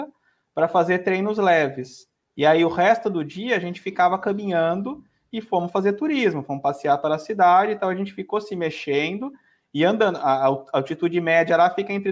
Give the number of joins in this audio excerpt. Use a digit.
0